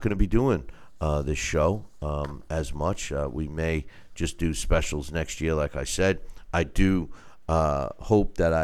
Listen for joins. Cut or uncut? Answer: uncut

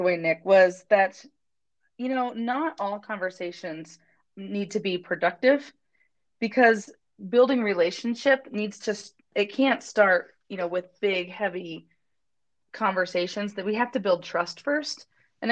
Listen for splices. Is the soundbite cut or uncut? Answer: uncut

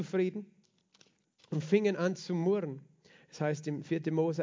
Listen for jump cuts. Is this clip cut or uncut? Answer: uncut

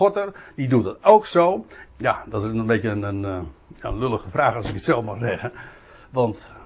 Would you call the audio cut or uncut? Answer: cut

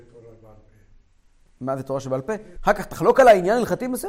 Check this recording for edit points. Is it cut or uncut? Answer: cut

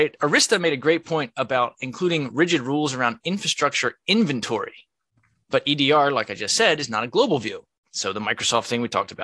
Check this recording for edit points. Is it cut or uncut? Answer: cut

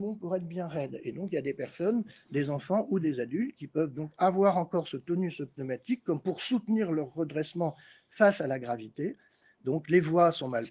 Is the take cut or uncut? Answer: uncut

